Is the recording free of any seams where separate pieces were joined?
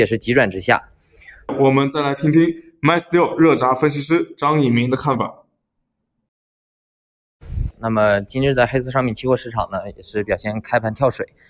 no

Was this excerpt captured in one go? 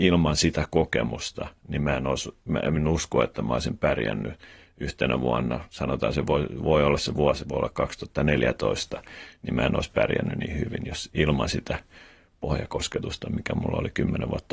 yes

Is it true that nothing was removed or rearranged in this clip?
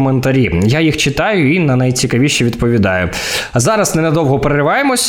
yes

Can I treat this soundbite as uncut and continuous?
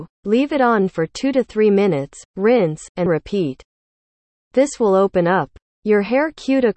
no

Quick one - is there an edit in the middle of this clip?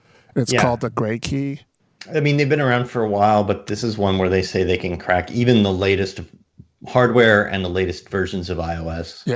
no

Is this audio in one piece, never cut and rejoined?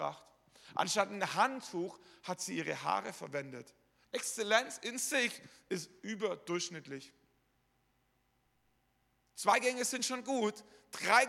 no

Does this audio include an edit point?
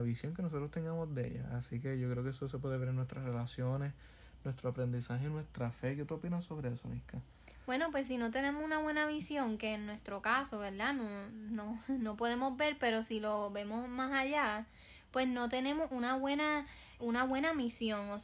yes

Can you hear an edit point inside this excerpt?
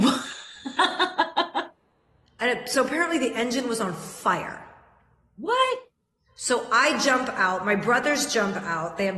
no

